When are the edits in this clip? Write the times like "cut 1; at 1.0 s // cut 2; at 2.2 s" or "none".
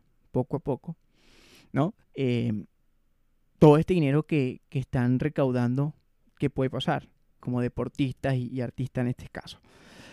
cut 1; at 2.0 s // cut 2; at 7.4 s